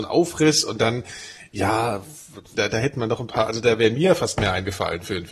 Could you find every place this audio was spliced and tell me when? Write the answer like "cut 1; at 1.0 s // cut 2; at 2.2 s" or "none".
cut 1; at 2.5 s